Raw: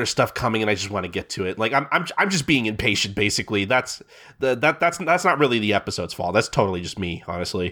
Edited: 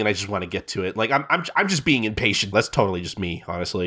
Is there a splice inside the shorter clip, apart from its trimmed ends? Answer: yes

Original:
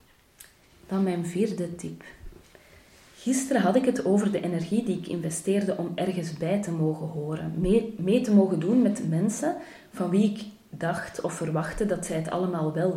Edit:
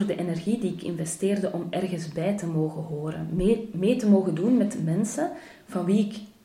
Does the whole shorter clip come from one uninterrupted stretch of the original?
yes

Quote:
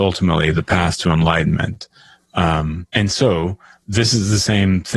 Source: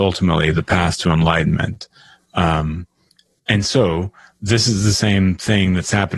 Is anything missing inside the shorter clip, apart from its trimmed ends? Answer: yes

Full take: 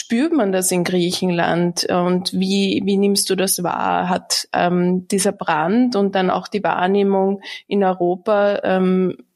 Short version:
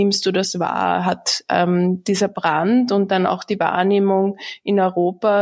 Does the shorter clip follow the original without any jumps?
yes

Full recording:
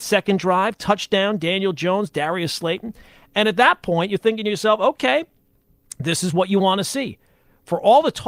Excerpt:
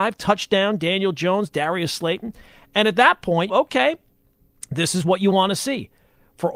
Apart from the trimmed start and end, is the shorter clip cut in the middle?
yes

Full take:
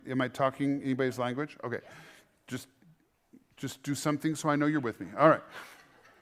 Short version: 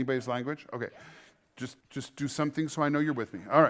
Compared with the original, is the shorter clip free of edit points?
no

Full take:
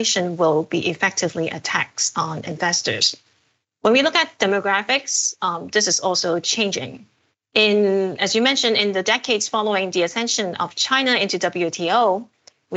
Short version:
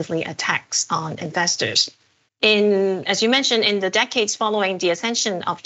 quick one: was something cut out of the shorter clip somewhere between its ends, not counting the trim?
yes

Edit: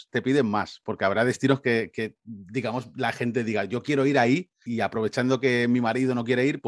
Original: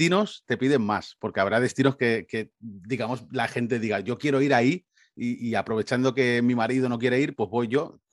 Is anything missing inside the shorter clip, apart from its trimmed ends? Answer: yes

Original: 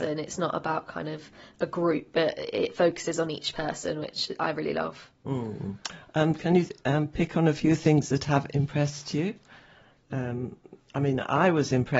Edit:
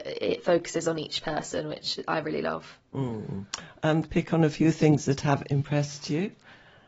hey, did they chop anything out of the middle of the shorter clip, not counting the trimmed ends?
yes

